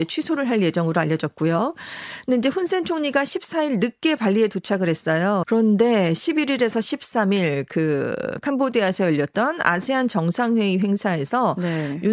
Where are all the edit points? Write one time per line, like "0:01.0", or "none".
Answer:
0:05.4